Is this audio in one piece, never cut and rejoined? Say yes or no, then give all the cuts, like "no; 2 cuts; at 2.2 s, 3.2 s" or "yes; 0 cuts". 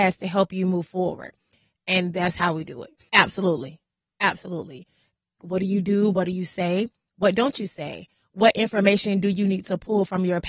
no; 2 cuts; at 3.1 s, 5.4 s